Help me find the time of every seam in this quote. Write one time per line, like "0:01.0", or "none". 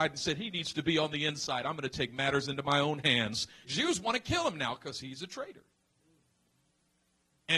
0:03.6